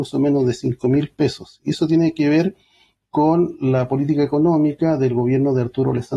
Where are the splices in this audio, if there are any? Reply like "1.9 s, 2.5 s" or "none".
none